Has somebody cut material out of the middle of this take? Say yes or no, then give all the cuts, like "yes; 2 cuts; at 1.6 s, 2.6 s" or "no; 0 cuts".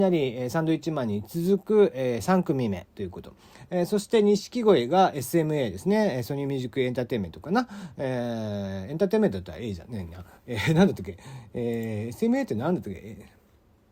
no; 0 cuts